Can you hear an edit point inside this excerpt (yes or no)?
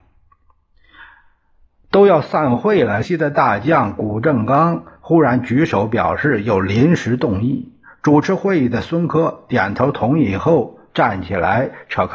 yes